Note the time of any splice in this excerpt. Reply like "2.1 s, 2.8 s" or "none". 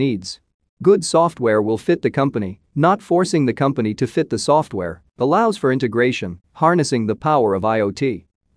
5.1 s